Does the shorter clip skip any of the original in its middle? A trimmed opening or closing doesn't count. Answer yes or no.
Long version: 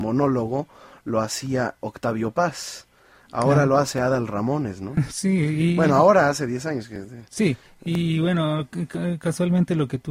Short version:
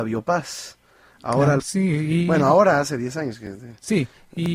yes